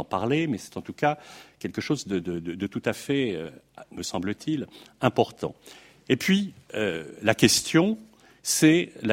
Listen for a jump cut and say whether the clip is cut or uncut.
cut